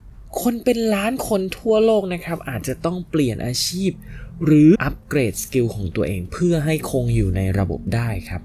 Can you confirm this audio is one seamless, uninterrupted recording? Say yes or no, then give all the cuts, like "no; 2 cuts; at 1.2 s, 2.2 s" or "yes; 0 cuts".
no; 1 cut; at 4.7 s